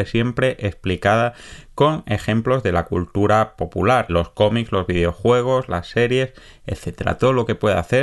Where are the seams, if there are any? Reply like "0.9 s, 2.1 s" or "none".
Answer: 4.1 s, 5.7 s